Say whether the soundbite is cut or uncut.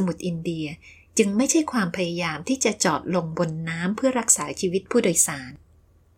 uncut